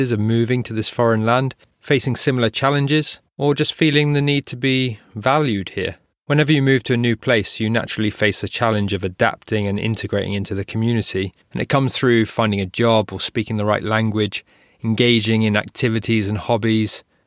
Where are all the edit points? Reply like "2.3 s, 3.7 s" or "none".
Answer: none